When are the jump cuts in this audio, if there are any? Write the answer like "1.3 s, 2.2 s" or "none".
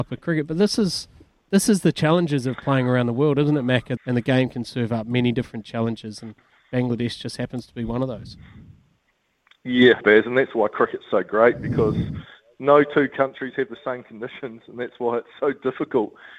4.0 s, 10.0 s